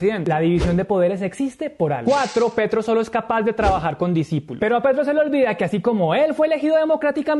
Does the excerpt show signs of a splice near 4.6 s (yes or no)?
yes